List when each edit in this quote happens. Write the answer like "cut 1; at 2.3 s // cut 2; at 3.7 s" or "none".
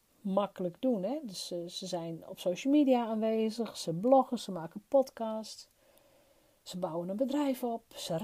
cut 1; at 4.4 s